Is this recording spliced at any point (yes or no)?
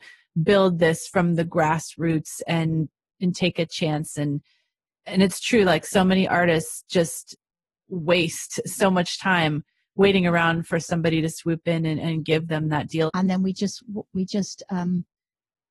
yes